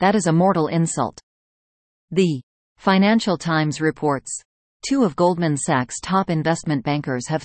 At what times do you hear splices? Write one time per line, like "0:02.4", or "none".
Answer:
none